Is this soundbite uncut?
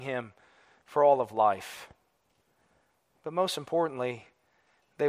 yes; 0 cuts

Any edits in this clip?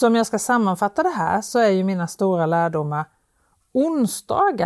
no; 0 cuts

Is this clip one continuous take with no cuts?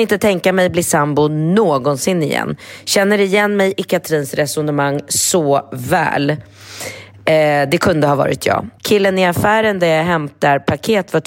no; 1 cut; at 8.8 s

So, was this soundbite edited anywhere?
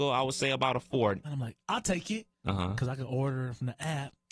yes; 2 cuts; at 1.2 s, 2.3 s

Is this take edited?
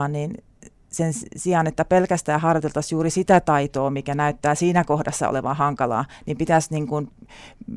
no; 0 cuts

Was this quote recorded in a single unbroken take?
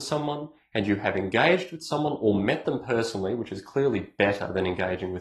yes; 0 cuts

